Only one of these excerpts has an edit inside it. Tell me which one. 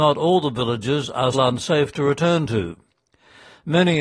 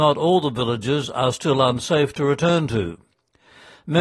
first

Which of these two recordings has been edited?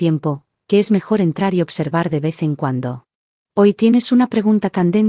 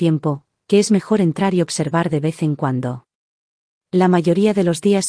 first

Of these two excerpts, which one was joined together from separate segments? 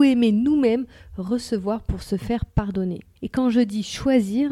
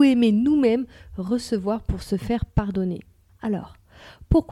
first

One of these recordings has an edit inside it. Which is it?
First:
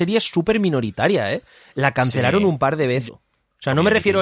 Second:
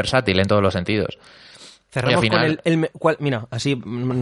first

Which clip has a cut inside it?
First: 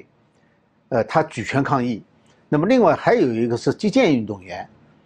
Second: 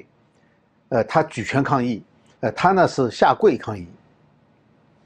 second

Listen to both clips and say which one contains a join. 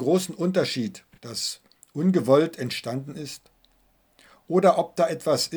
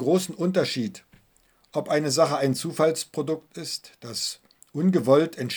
first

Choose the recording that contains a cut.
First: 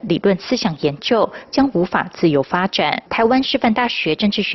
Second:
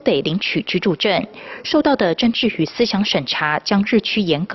first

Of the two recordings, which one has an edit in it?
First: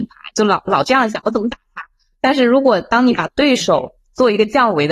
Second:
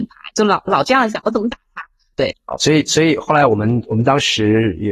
second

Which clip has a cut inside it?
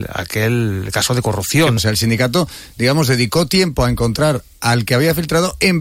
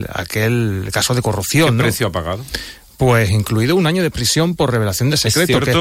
first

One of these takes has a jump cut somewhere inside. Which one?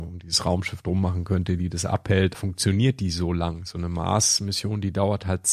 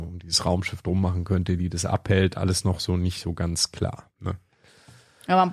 first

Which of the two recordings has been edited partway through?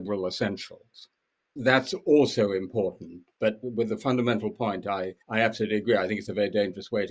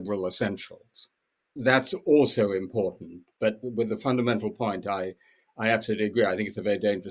first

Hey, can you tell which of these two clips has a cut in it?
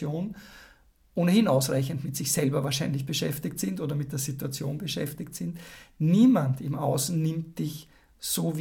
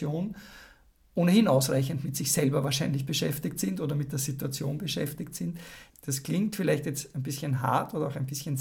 second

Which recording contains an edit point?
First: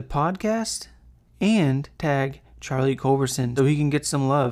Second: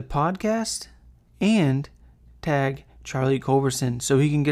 first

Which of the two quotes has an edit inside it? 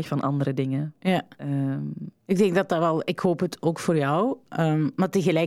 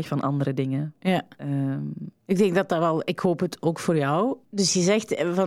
second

